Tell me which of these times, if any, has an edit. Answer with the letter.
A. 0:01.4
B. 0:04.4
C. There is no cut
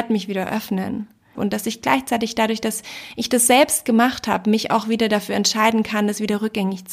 A